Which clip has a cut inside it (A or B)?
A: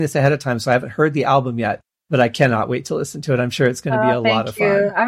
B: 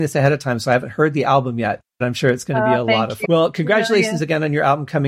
B